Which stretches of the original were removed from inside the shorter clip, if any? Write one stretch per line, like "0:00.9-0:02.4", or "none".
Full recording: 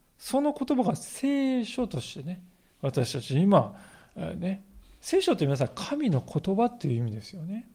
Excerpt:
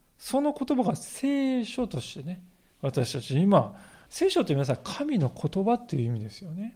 0:04.1-0:05.0

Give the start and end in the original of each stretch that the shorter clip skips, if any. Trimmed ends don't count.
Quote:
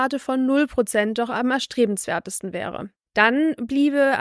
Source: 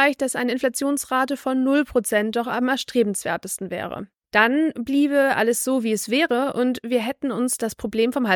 none

